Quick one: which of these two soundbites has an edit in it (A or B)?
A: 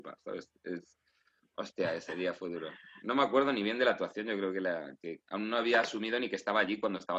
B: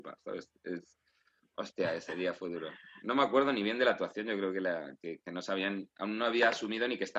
A